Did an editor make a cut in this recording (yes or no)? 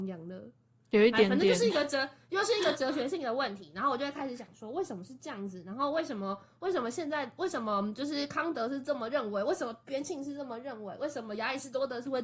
no